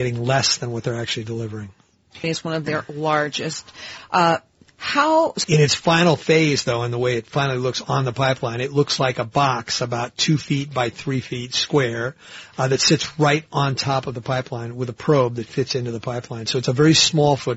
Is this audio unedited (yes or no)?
no